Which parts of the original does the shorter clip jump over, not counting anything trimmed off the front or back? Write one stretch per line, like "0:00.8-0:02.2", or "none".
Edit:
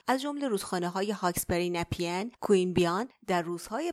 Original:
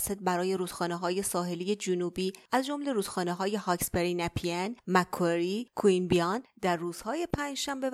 0:04.8-0:05.7